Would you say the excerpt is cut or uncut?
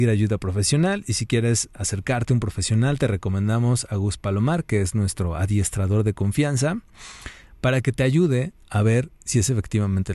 uncut